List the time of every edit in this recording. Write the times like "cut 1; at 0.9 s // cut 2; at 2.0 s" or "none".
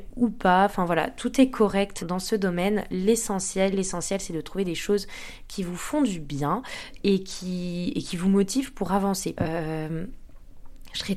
cut 1; at 2.0 s // cut 2; at 3.7 s // cut 3; at 9.4 s